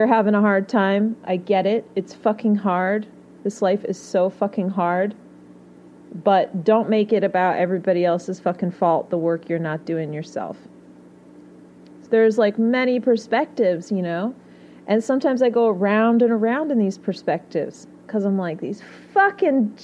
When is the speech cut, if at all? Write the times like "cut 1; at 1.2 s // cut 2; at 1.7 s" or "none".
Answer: cut 1; at 12.1 s